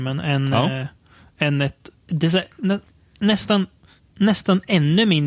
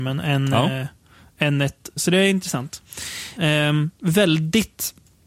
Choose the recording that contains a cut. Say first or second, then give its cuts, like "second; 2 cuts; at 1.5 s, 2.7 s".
second; 2 cuts; at 2.0 s, 3.4 s